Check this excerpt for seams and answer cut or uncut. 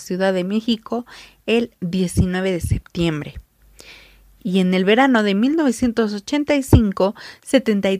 uncut